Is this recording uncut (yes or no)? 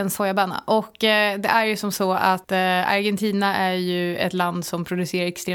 yes